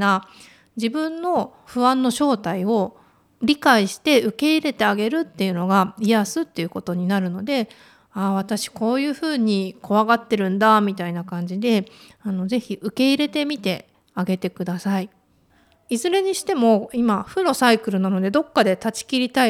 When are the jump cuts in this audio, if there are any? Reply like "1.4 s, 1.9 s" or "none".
none